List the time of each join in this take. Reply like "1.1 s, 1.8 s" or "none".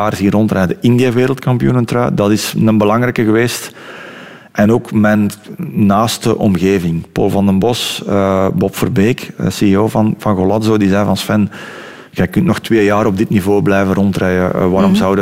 none